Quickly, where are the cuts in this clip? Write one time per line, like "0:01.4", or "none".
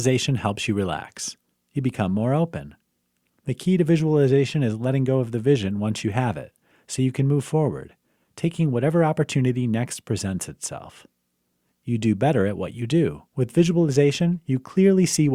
0:01.5
0:11.7
0:13.3